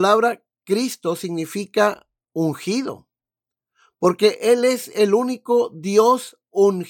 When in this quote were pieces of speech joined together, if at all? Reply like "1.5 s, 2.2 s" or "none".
none